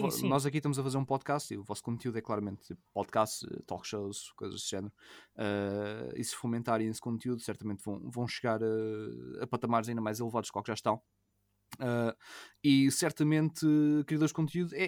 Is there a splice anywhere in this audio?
no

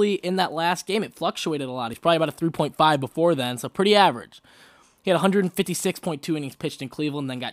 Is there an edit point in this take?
no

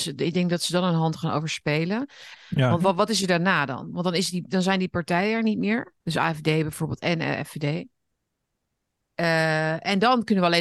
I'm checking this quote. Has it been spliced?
yes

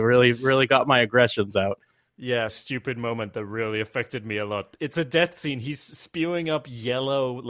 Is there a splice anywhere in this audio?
yes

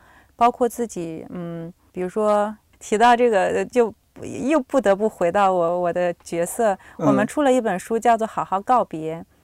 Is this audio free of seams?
yes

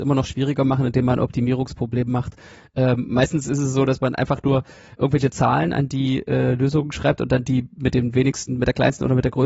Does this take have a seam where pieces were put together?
no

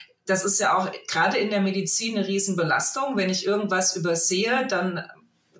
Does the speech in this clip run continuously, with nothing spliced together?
yes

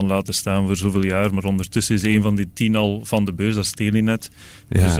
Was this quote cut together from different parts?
no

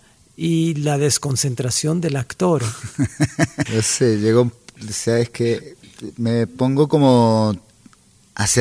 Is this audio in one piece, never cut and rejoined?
no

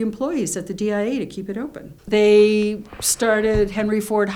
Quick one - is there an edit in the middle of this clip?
yes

